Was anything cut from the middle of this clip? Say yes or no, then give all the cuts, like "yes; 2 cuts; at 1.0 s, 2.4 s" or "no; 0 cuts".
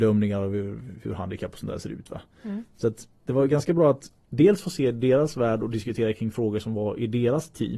no; 0 cuts